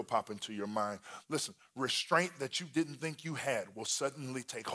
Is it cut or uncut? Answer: uncut